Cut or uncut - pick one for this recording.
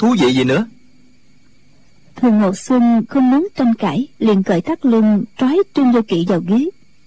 cut